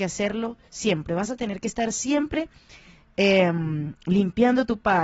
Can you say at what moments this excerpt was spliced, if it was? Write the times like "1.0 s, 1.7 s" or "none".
none